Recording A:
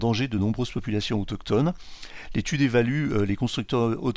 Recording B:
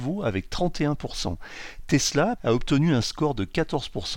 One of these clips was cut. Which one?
B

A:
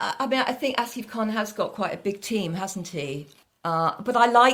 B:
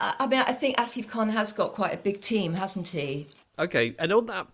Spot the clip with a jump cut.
B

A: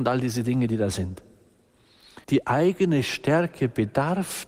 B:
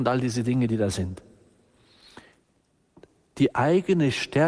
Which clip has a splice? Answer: A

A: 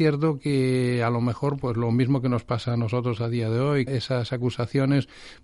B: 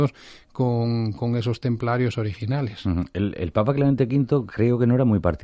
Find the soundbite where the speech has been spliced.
A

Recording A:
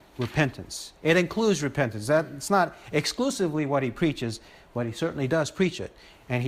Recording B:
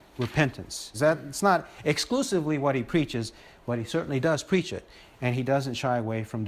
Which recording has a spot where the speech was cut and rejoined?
B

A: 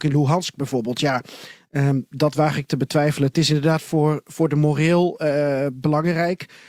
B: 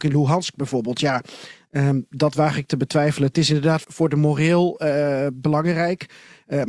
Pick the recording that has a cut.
B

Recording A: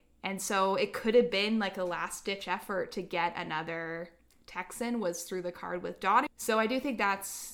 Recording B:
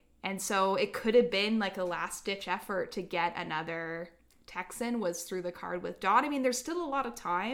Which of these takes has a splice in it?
A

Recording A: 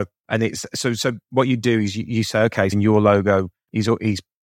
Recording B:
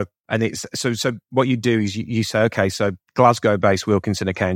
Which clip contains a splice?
A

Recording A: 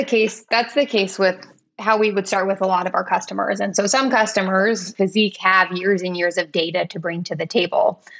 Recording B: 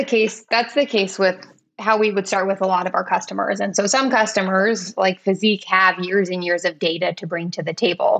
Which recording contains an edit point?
A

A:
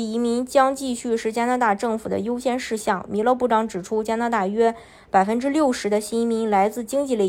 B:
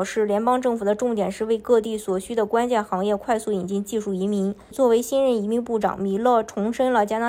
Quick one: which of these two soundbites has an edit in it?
B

